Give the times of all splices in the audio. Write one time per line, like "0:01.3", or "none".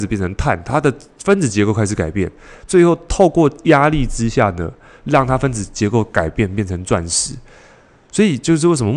none